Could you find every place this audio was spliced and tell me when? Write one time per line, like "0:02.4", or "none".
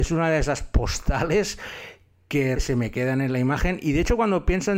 0:02.6